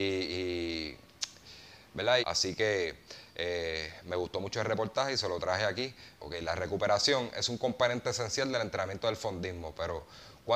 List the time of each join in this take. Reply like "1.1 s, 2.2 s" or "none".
2.2 s, 6.2 s